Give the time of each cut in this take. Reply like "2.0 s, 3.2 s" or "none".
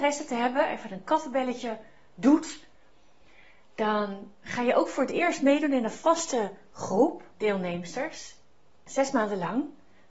none

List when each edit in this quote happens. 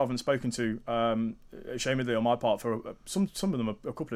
2.8 s

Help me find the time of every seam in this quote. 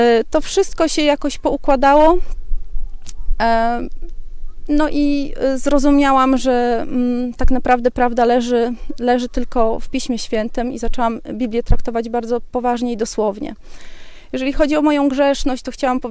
none

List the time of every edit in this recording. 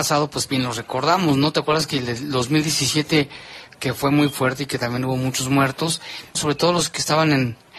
6.3 s

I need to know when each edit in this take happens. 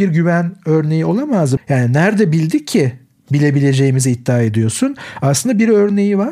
1.6 s

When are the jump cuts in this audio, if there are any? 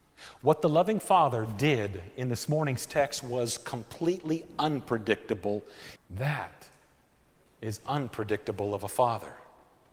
6.0 s

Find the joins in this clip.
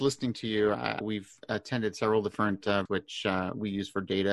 1.0 s, 2.9 s

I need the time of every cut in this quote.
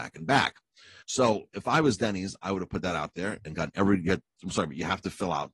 1.0 s

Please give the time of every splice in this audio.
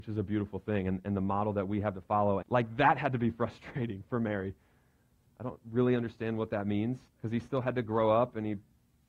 2.4 s, 5.2 s, 7.1 s

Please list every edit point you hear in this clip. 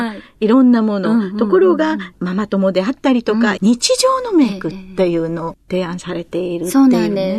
3.6 s

